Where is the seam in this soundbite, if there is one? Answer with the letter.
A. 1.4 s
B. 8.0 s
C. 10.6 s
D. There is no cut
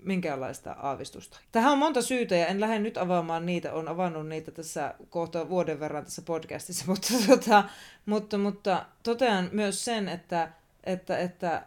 A